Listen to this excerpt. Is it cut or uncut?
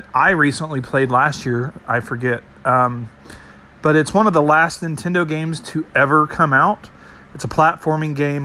cut